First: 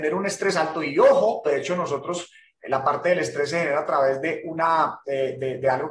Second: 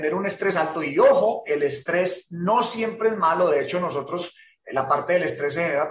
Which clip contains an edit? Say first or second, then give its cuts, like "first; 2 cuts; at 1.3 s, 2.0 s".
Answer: first; 1 cut; at 1.4 s